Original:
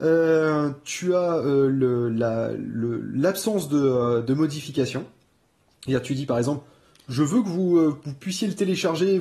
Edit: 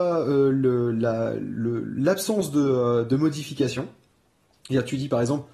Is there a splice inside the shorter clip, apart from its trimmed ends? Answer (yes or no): no